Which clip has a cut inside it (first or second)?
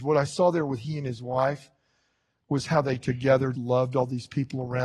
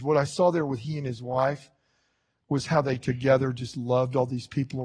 first